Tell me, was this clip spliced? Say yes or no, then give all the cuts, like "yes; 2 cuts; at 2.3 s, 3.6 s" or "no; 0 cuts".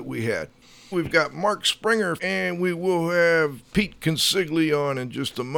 yes; 2 cuts; at 0.9 s, 2.2 s